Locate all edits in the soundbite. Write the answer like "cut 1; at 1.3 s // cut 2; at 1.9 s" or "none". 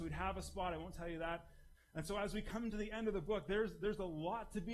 cut 1; at 1.7 s

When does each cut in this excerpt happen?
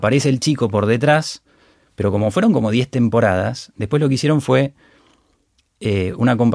cut 1; at 1.9 s

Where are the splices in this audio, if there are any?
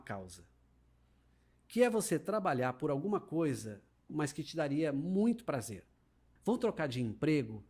cut 1; at 4.1 s // cut 2; at 6.4 s

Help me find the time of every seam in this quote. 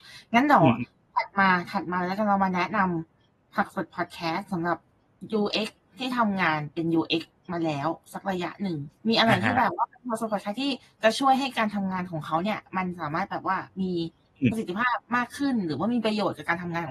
cut 1; at 9.0 s

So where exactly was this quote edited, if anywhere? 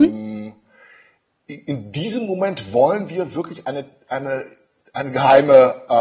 none

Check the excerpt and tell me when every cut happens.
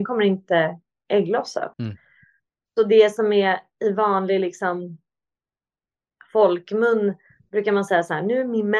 cut 1; at 1.7 s

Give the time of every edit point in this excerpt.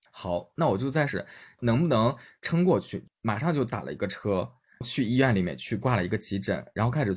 cut 1; at 1.1 s

